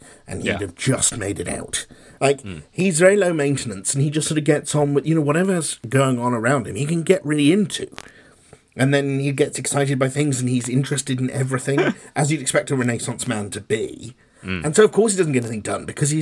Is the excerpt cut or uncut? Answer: cut